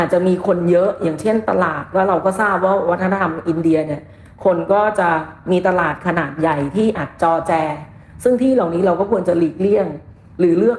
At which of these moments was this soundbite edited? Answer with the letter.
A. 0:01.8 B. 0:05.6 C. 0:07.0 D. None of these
C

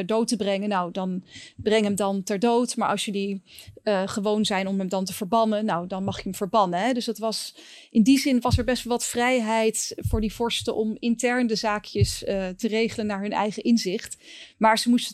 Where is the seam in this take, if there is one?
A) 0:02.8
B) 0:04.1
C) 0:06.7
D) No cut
D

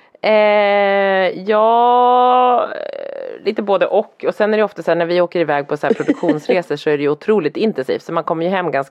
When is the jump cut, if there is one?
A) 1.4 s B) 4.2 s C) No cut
C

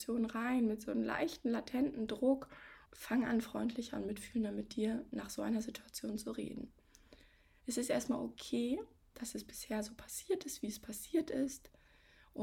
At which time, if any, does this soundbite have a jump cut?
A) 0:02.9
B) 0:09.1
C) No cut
A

